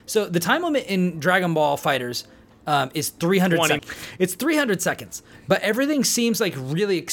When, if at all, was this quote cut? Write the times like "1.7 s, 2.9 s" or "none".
3.8 s, 5.3 s